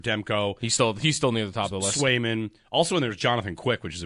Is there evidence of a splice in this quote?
no; 0 cuts

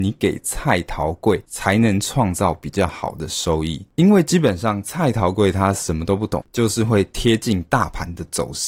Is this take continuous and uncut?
no; 1 cut; at 6.4 s

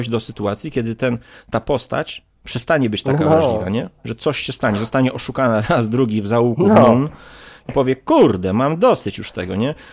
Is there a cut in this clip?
no; 0 cuts

